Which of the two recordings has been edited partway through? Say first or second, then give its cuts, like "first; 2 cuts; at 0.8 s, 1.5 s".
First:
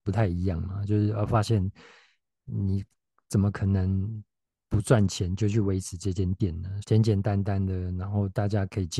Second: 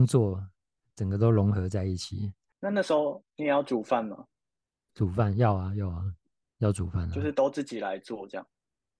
first; 1 cut; at 6.8 s